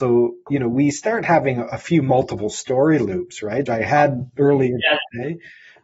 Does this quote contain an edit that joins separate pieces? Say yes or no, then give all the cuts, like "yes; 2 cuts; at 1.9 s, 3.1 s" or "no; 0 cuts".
yes; 1 cut; at 3.7 s